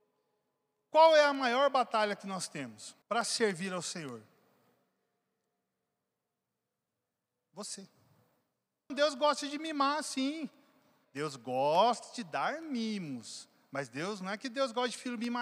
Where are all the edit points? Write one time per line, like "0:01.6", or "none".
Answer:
0:03.0
0:08.9
0:11.0